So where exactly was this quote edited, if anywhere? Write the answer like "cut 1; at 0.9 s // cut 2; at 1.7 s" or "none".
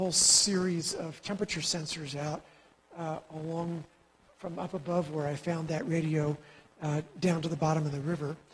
none

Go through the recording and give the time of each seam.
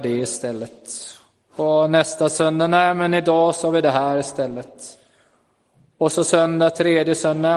none

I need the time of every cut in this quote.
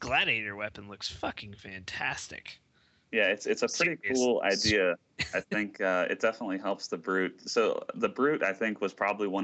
none

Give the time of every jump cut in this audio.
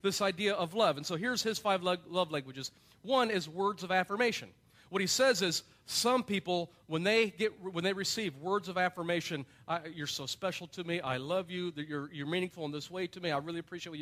none

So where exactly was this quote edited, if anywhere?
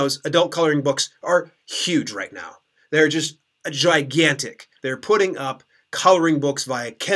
cut 1; at 4.8 s

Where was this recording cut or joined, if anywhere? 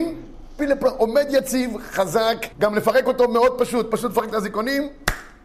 cut 1; at 2.5 s

